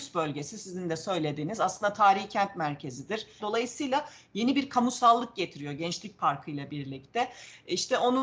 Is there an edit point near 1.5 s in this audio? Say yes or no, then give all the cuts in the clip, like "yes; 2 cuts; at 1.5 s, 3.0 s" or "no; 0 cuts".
no; 1 cut; at 3.4 s